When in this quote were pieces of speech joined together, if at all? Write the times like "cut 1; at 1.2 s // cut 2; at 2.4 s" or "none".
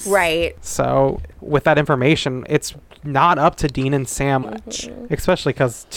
cut 1; at 1.3 s // cut 2; at 4.4 s